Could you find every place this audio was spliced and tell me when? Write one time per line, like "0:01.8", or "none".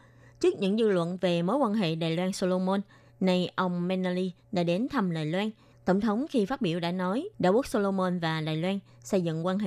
0:05.7
0:07.3